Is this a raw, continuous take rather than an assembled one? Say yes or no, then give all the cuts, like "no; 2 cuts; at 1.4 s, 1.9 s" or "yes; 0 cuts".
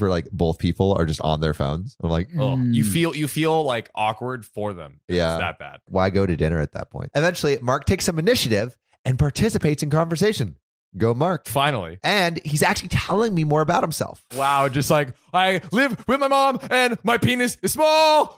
no; 1 cut; at 14.3 s